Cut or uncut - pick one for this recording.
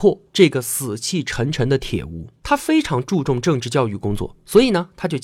cut